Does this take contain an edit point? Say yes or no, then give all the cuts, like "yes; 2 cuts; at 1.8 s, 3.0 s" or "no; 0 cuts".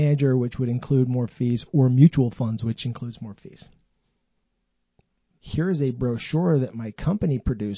yes; 1 cut; at 5.4 s